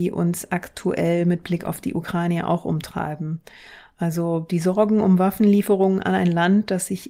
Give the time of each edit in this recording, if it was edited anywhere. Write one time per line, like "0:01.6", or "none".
none